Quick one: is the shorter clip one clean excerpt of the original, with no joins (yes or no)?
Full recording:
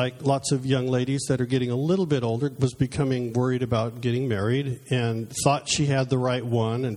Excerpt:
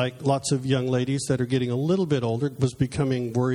yes